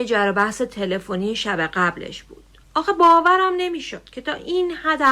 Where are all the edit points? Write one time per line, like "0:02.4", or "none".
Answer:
none

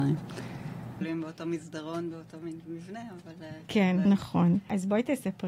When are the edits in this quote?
0:01.0
0:04.0

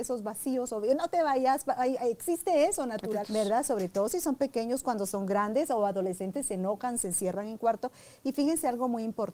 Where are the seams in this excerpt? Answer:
0:03.2

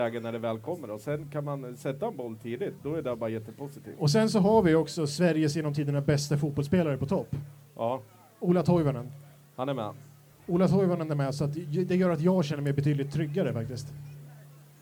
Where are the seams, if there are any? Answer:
0:02.8

